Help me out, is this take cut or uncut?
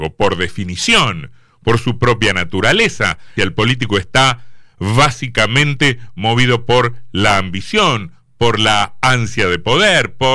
cut